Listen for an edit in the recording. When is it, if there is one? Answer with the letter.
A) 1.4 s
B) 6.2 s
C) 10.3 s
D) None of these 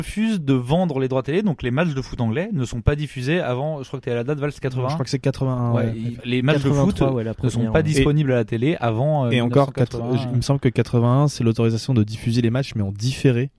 B